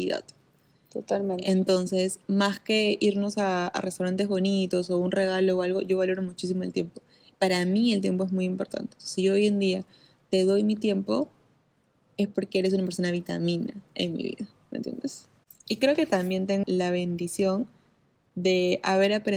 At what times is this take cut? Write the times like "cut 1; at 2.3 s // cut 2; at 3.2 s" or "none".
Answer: cut 1; at 16.6 s